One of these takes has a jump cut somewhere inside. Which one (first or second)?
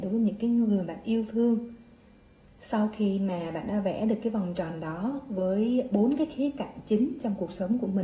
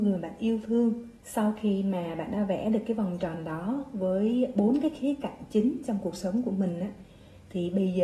second